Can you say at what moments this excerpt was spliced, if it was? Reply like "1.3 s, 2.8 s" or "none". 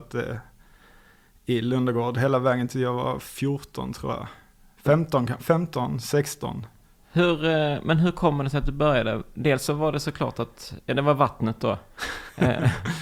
none

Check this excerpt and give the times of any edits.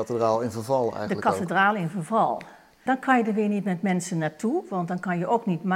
2.9 s

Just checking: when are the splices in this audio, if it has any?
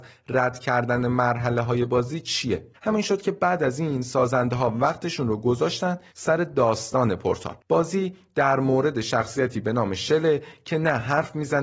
2.7 s, 7.6 s

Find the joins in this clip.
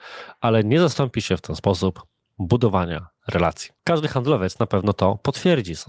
3.8 s

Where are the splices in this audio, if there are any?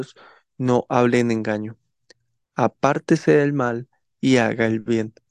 none

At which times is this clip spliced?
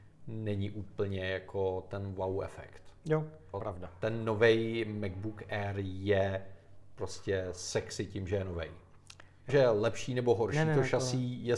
3.5 s, 9.5 s

